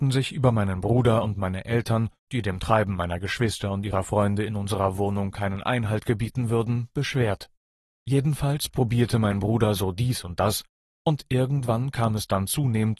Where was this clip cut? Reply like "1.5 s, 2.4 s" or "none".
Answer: 7.9 s